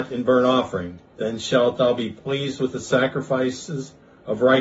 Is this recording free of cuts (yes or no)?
no